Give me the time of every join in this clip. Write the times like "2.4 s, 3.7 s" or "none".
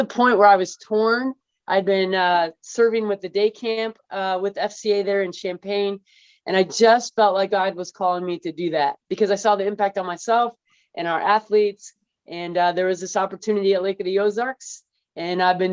none